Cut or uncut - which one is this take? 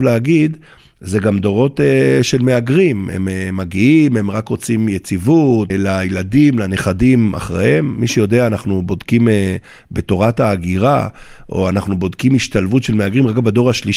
cut